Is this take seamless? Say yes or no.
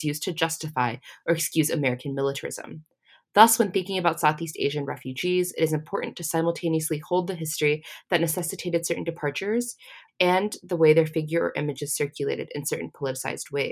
no